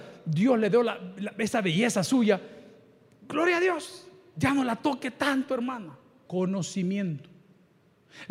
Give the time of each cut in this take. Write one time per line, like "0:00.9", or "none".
0:06.3